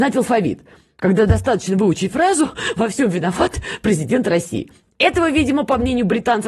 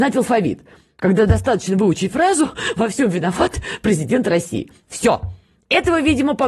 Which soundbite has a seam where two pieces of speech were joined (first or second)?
first